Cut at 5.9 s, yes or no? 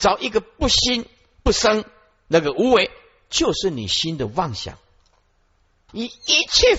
yes